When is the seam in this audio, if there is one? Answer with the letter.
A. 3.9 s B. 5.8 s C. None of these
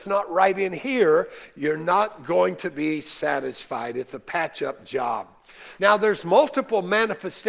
B